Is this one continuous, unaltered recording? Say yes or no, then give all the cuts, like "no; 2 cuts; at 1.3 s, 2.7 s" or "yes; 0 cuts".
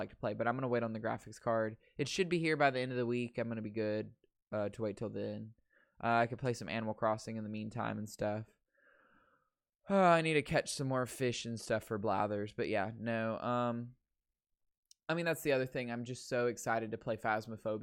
yes; 0 cuts